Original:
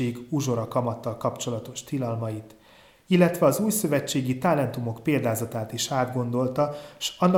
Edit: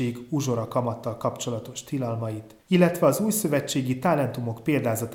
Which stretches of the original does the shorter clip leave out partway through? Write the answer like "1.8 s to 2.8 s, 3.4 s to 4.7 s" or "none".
2.6 s to 3.0 s